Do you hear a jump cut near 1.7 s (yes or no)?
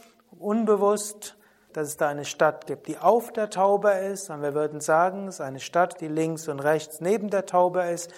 yes